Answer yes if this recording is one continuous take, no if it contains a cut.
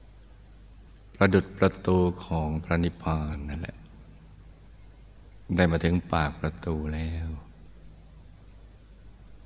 yes